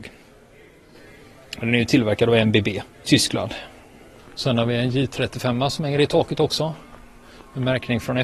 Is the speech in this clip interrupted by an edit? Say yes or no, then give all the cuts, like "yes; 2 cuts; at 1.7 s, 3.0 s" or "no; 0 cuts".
yes; 1 cut; at 2.9 s